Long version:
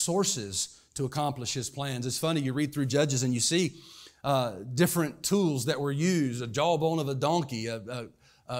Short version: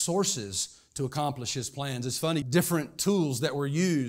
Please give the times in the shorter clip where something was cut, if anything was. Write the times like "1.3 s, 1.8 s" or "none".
2.4 s